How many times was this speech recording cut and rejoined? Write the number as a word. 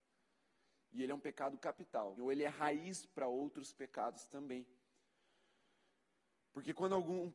one